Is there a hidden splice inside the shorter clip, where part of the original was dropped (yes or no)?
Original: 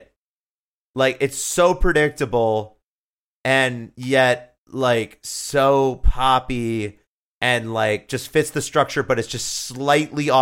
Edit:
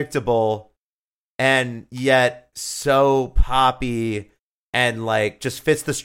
yes